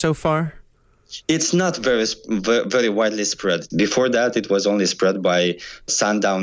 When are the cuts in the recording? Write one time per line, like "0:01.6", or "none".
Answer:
0:03.7